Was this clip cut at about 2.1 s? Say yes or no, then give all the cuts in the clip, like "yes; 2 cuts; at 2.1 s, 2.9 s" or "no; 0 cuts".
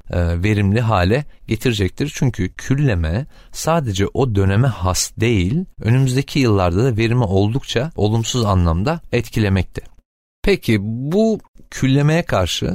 no; 0 cuts